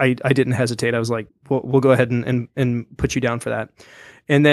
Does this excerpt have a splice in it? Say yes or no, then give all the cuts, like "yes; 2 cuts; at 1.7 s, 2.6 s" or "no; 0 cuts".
yes; 1 cut; at 1.3 s